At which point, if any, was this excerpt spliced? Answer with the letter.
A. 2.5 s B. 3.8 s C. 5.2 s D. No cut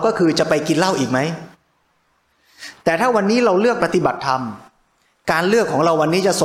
B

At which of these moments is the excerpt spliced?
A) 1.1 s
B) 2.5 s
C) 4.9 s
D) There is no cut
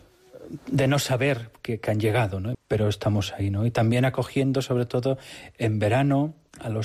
B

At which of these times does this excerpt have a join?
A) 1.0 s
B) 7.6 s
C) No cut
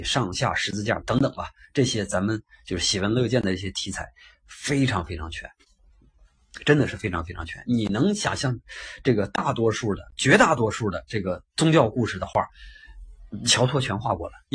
A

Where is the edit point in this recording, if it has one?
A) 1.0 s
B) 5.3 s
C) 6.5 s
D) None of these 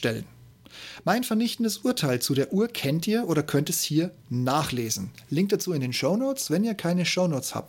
D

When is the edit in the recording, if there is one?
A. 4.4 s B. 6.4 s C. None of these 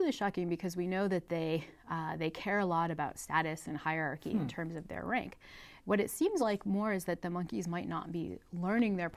C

